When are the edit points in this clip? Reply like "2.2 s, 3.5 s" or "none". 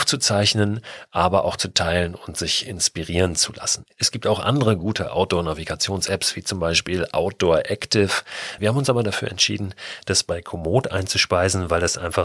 8.6 s